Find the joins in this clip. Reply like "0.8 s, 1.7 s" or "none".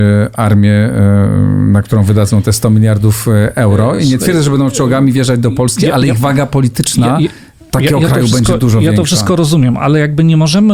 none